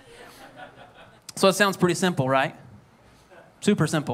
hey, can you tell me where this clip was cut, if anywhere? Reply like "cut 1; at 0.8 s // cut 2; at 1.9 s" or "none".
cut 1; at 1.2 s